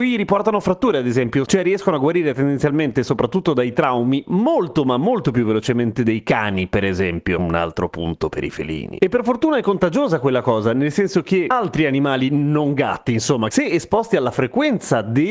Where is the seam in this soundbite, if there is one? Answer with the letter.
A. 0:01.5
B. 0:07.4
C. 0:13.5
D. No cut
C